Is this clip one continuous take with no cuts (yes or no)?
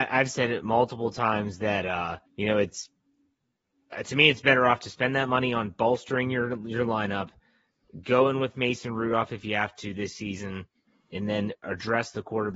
no